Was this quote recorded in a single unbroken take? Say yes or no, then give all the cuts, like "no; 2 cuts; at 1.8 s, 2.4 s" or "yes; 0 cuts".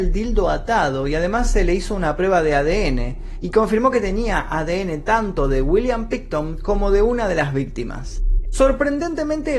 no; 1 cut; at 8.4 s